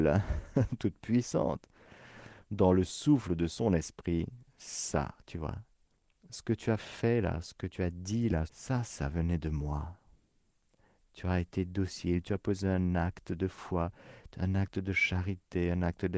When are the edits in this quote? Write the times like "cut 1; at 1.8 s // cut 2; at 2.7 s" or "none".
cut 1; at 8.5 s